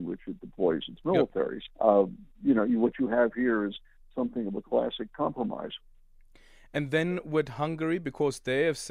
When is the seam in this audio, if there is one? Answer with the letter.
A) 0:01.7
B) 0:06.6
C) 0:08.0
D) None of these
A